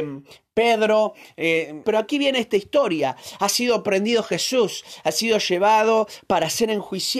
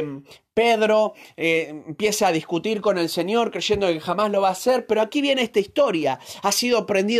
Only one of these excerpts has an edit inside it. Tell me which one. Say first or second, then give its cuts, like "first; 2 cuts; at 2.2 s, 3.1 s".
first; 1 cut; at 1.8 s